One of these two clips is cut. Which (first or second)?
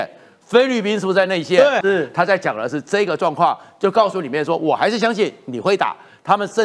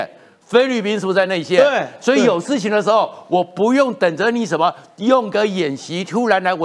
first